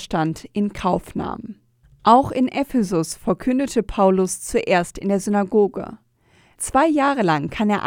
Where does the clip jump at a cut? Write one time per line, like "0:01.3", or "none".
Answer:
0:01.8
0:06.6